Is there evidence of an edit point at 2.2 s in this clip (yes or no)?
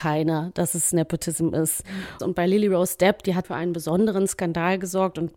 yes